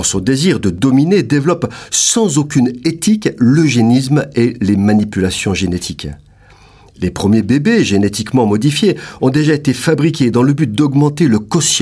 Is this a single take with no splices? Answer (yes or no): yes